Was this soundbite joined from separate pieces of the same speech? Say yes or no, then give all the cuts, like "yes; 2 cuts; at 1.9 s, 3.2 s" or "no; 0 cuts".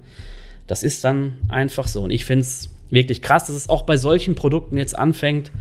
no; 0 cuts